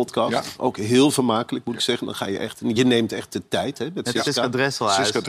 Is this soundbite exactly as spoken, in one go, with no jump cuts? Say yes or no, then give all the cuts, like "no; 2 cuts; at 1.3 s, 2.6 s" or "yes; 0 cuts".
yes; 0 cuts